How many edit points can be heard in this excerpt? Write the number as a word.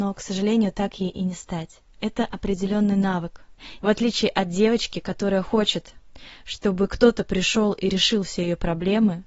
two